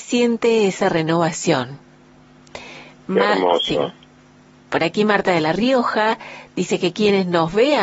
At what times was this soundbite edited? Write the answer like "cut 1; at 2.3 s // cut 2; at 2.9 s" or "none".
none